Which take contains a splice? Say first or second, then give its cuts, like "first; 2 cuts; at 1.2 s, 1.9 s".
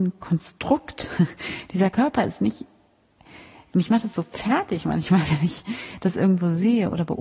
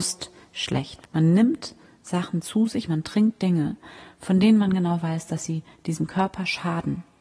second; 2 cuts; at 1.0 s, 2.9 s